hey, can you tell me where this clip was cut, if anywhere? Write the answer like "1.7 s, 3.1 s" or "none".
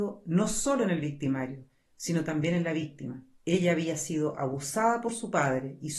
3.4 s